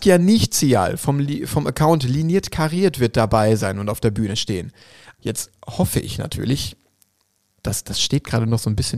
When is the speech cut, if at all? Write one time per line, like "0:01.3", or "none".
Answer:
0:05.2